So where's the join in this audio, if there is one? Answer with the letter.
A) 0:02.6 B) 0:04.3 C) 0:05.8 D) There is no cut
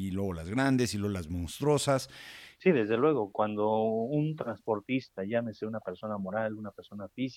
A